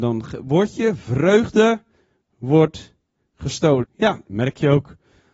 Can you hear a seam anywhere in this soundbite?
yes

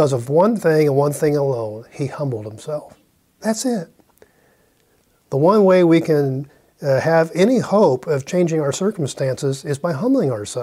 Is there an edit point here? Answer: no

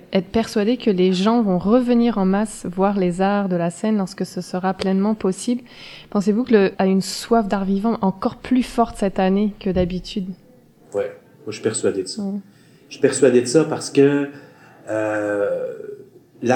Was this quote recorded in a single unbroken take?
no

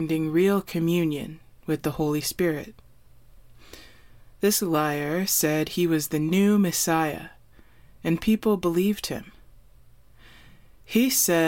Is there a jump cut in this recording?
no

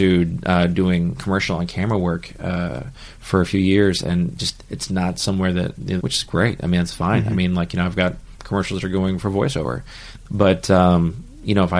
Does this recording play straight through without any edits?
no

